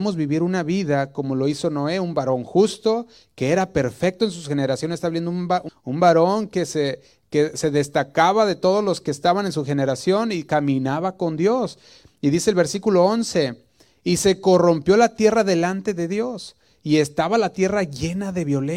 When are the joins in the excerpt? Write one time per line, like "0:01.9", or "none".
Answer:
0:05.7

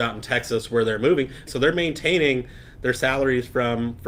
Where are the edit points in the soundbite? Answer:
0:01.5

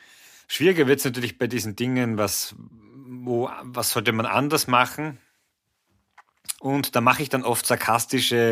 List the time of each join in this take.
0:06.6

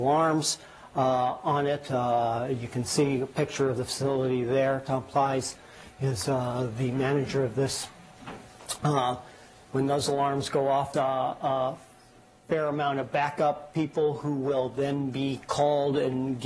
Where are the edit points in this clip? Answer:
0:10.9

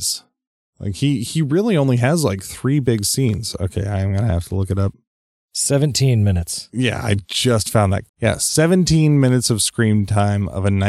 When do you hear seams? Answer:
0:08.1

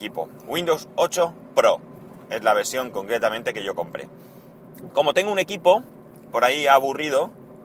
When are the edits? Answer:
0:04.9

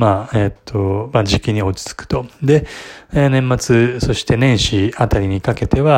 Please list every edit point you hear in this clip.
none

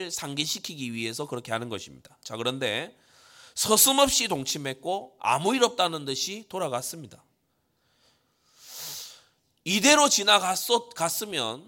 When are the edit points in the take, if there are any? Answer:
none

